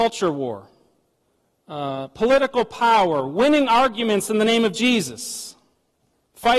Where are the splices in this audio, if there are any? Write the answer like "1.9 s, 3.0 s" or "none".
none